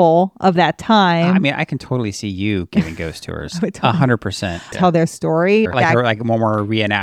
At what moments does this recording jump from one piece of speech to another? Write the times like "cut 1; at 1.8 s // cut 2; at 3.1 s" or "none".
cut 1; at 4.7 s // cut 2; at 5.7 s